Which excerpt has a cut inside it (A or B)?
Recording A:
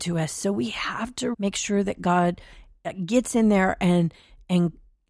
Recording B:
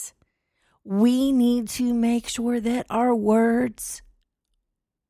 A